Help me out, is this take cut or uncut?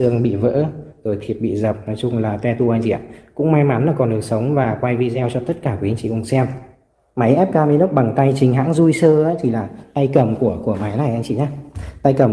uncut